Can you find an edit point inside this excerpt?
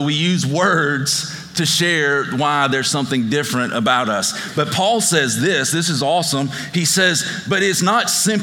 no; 0 cuts

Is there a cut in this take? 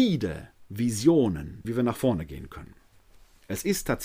yes; 1 cut; at 1.6 s

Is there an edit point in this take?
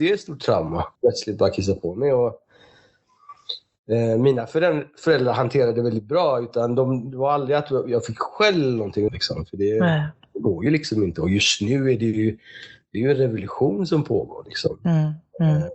yes; 2 cuts; at 1.0 s, 9.1 s

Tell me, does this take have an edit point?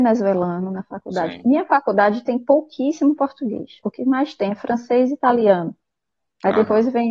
no; 0 cuts

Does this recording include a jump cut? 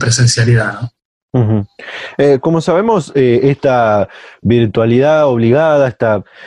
no; 0 cuts

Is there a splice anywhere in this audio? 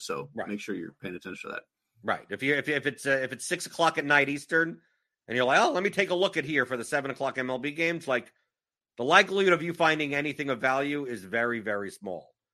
no; 0 cuts

